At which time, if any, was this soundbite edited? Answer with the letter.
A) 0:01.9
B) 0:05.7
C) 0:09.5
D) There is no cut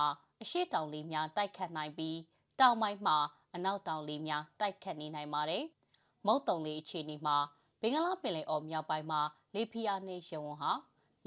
B